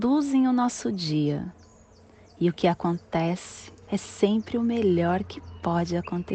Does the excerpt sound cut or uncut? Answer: cut